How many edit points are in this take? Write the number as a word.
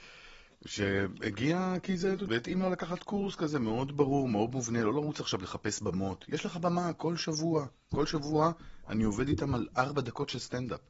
one